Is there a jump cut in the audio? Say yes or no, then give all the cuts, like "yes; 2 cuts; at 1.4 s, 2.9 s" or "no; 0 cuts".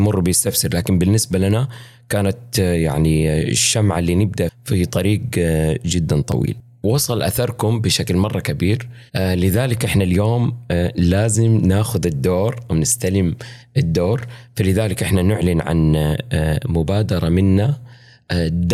yes; 1 cut; at 9.1 s